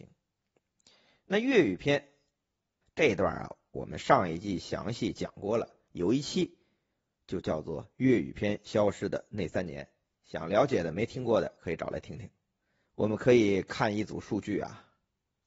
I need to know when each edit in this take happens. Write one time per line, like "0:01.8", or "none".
0:02.8
0:12.8